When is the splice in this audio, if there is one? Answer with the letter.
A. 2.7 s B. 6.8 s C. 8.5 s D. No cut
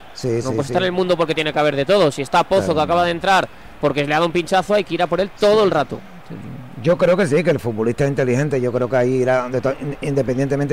D